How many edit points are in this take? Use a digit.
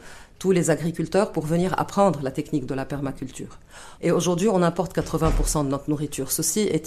1